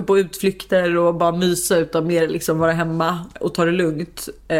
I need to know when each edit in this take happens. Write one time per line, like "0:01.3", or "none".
0:03.4

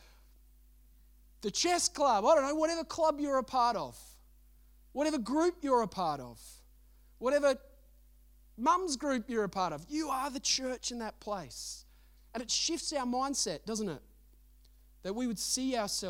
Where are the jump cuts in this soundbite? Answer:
none

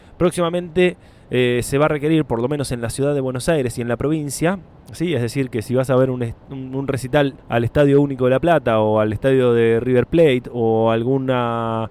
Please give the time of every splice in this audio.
0:07.4

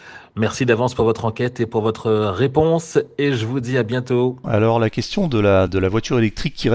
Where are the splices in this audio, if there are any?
0:04.4
0:05.7

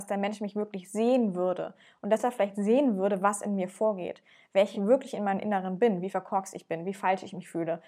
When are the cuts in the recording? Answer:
none

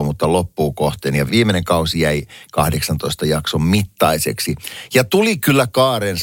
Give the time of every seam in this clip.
0:01.3

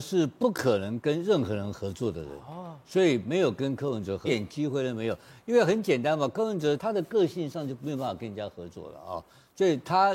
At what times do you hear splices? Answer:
0:04.3
0:06.8

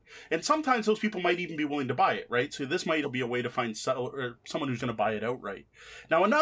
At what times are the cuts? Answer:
0:03.0
0:04.8

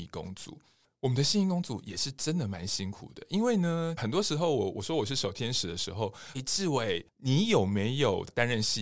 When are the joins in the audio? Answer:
0:04.0
0:06.3

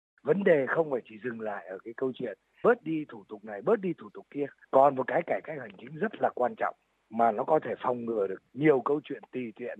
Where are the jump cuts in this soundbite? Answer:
0:04.6
0:08.5

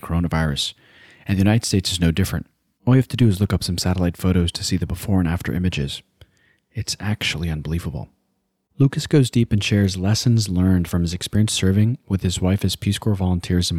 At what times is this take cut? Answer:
none

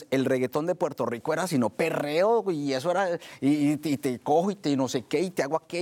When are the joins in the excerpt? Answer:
none

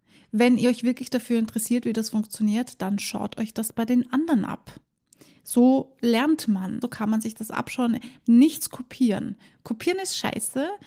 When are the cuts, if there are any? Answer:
0:06.8
0:08.2

